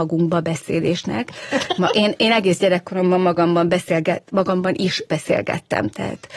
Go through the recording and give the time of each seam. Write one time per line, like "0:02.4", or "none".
0:01.8